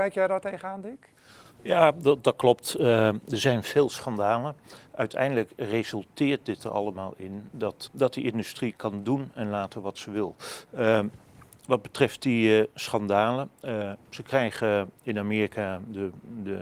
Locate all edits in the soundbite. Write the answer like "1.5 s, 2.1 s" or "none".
7.9 s